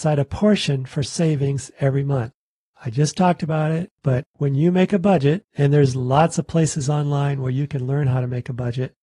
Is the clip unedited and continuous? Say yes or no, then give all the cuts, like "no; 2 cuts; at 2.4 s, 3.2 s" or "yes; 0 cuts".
yes; 0 cuts